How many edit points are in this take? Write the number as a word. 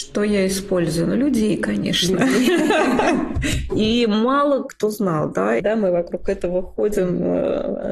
two